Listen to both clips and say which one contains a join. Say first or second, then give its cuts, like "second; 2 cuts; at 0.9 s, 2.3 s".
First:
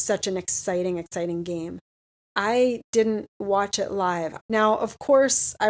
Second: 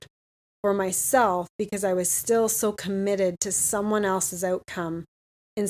first; 2 cuts; at 2.1 s, 4.4 s